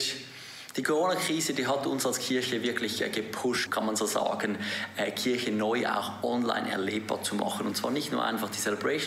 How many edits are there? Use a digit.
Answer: 1